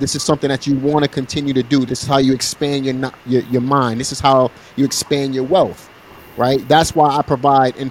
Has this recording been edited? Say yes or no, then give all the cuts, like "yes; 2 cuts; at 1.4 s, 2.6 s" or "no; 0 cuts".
yes; 2 cuts; at 1.9 s, 6.6 s